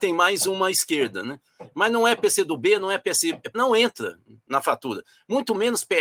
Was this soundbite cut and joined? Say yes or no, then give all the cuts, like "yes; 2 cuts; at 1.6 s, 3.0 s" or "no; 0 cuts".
yes; 1 cut; at 3.5 s